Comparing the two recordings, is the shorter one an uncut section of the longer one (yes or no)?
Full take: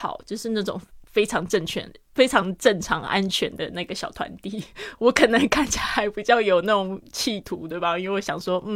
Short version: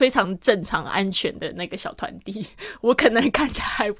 yes